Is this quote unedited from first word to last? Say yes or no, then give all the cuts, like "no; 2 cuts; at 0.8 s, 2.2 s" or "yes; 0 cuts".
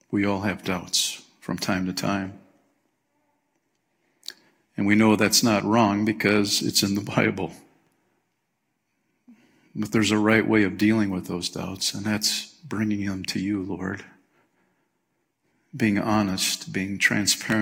yes; 0 cuts